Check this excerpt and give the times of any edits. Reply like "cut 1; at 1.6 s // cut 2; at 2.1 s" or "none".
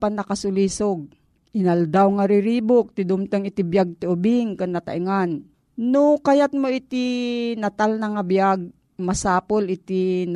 none

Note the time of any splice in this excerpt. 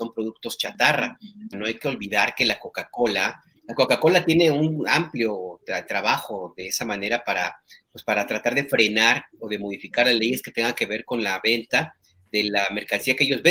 cut 1; at 1.5 s // cut 2; at 3.6 s

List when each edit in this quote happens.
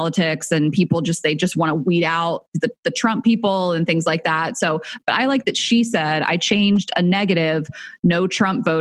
none

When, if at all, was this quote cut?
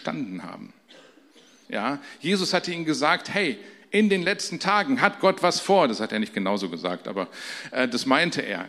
cut 1; at 1.6 s

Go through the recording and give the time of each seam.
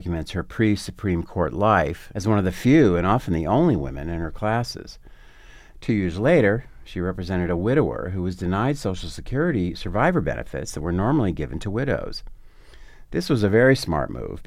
cut 1; at 2.1 s // cut 2; at 5.7 s

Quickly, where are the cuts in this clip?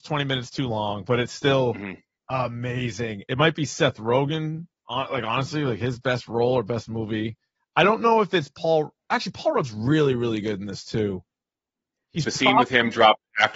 cut 1; at 3.2 s // cut 2; at 7.6 s

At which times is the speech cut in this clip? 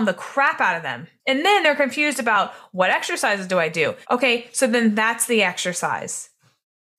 cut 1; at 4.0 s

